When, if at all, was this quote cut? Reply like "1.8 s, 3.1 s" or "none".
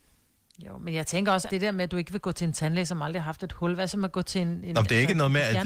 1.5 s